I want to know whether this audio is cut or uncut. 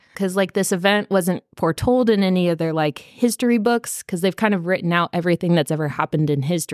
uncut